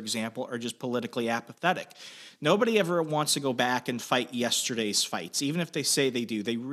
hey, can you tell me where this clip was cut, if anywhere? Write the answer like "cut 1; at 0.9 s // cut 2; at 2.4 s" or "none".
none